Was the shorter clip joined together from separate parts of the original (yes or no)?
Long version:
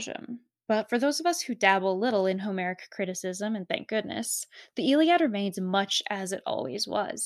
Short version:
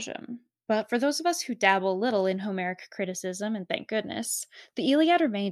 no